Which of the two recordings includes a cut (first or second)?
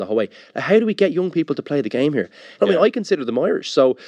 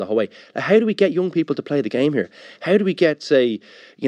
first